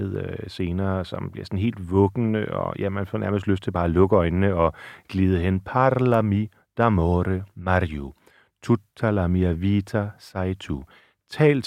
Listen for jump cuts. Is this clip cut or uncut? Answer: uncut